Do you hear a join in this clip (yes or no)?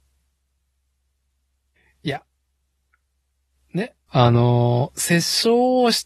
yes